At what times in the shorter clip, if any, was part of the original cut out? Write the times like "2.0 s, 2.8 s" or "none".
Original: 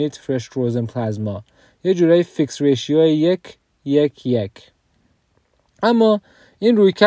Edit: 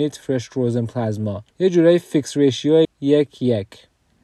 1.5 s, 2.8 s